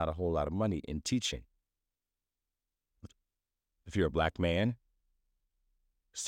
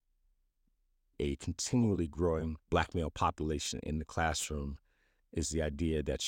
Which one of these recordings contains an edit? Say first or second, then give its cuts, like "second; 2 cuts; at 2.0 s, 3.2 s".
second; 2 cuts; at 1.1 s, 2.6 s